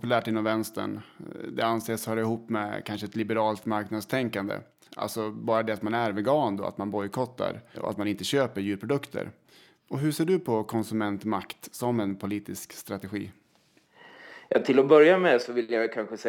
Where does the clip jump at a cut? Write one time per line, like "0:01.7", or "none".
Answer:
0:04.8
0:07.7